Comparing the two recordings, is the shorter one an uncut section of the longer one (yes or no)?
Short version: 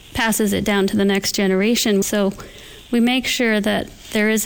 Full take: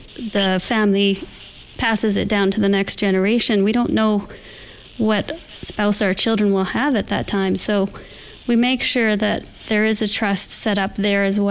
no